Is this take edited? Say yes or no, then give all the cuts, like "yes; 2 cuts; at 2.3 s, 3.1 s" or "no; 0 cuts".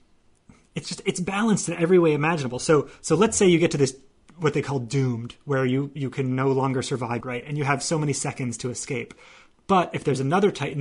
yes; 1 cut; at 7.2 s